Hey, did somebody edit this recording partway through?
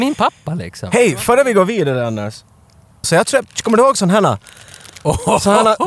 yes; 1 cut; at 3.0 s

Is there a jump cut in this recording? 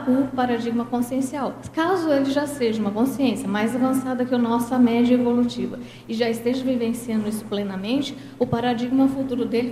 no; 0 cuts

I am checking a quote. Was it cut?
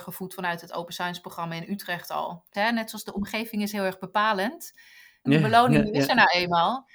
yes; 2 cuts; at 2.5 s, 5.3 s

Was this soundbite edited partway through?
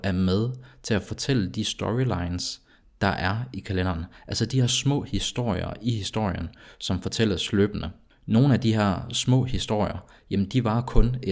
no; 0 cuts

